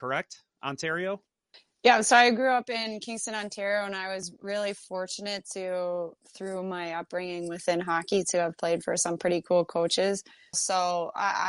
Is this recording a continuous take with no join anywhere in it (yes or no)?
no